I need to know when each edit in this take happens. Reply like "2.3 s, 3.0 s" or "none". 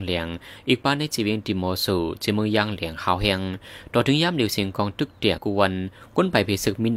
5.4 s